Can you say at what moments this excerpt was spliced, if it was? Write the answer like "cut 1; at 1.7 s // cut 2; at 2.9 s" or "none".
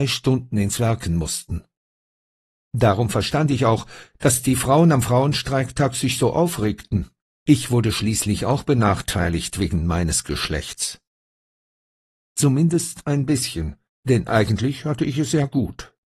none